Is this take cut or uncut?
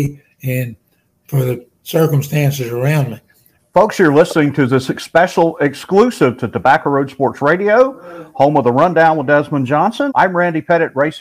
cut